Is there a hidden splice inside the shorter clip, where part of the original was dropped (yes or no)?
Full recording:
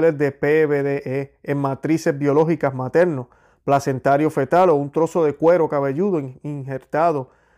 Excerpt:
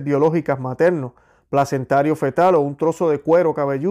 no